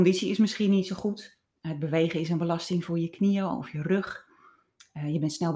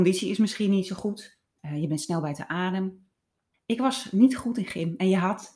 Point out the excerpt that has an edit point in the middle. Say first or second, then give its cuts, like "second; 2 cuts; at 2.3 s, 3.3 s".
second; 2 cuts; at 1.6 s, 3.5 s